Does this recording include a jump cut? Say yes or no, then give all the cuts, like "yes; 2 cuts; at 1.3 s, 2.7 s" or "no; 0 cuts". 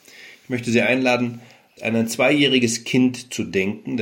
yes; 1 cut; at 1.8 s